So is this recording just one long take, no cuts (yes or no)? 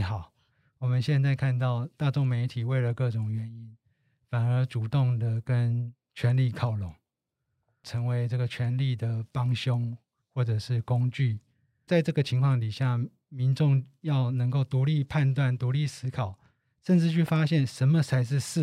yes